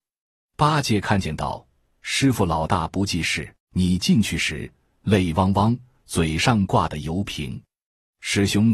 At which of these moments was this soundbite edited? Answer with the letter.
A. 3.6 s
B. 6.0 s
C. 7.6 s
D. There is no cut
A